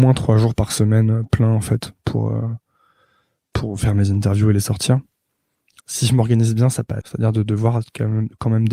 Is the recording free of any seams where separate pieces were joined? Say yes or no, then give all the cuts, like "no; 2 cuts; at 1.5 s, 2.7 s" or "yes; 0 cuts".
no; 2 cuts; at 5.8 s, 7.0 s